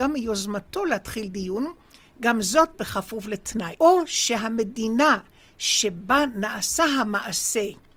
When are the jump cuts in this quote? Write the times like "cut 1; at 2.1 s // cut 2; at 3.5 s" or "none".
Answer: cut 1; at 3.8 s